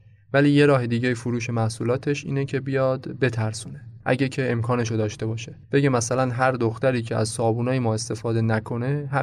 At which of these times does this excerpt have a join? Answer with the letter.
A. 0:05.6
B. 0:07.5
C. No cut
A